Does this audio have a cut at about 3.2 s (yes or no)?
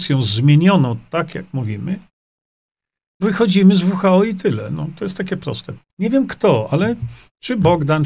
yes